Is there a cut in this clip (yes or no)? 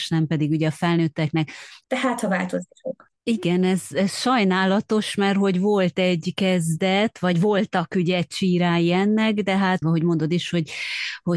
yes